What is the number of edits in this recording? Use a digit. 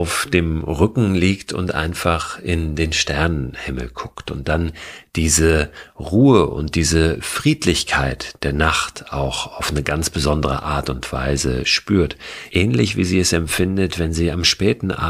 0